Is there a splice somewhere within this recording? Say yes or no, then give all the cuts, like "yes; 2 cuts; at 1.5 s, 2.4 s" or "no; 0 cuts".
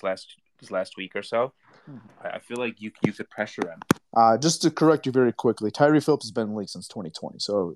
yes; 2 cuts; at 2.1 s, 4.0 s